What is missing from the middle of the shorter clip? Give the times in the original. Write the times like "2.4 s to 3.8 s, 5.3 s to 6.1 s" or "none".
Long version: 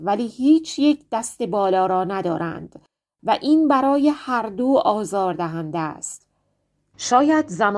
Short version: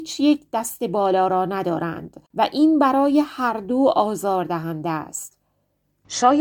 2.8 s to 3.1 s

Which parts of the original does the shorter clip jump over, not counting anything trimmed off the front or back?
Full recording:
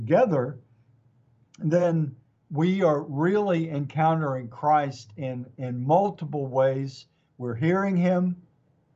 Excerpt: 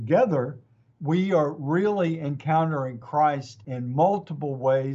0.9 s to 2.4 s, 5.1 s to 5.6 s

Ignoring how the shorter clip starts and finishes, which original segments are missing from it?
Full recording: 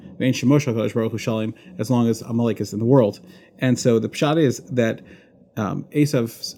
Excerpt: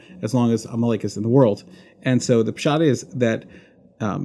none

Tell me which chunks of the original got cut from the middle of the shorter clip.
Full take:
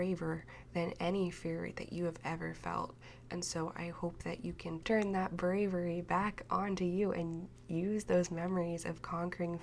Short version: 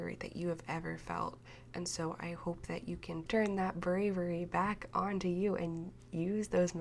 none

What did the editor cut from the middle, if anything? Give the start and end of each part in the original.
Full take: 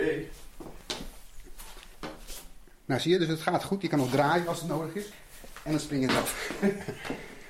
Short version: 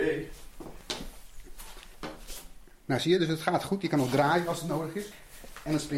none

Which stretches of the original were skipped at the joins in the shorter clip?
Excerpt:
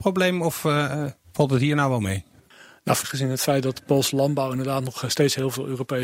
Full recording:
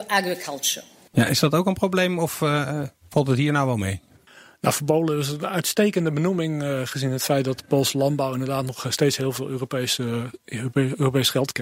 4.8 s to 6.8 s

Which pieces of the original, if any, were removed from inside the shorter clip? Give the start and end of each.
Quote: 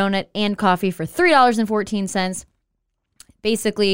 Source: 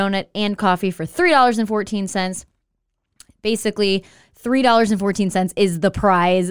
none

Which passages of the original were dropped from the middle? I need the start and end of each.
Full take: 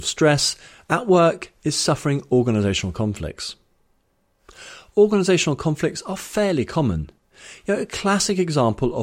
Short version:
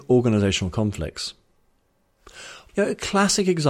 4.9 s to 7.6 s

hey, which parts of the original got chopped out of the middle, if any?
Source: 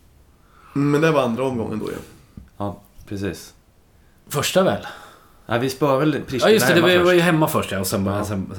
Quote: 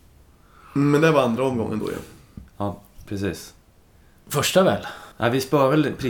5.1 s to 5.4 s

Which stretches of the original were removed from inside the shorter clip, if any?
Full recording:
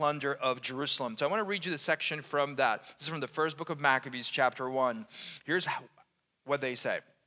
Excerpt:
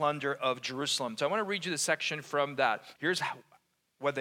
3.0 s to 5.4 s

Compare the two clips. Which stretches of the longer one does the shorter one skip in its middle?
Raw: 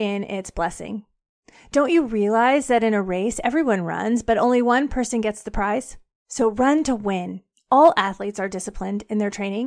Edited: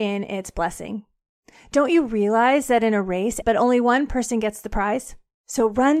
3.4 s to 4.2 s

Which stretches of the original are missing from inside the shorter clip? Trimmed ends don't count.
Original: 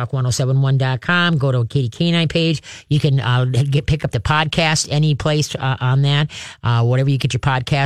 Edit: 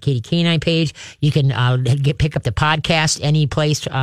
none

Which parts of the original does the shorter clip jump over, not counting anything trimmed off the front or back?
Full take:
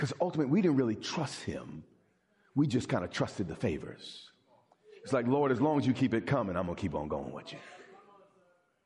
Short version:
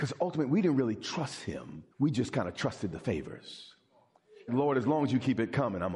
1.9 s to 2.5 s, 5.0 s to 5.2 s

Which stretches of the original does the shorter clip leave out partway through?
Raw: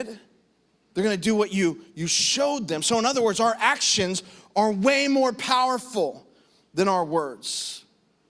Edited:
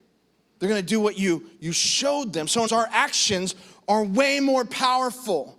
3.0 s to 3.3 s

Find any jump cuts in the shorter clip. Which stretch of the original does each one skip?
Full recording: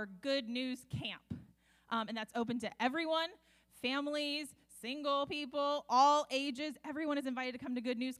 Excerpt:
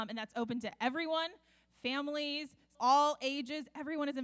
4.7 s to 5.8 s

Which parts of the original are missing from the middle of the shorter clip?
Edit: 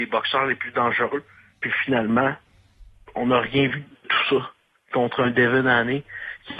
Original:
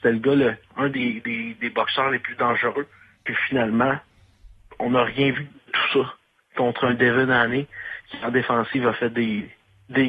none

